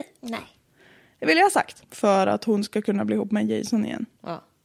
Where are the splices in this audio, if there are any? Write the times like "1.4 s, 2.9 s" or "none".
1.8 s